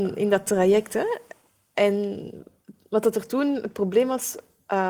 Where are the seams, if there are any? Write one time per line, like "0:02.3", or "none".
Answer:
none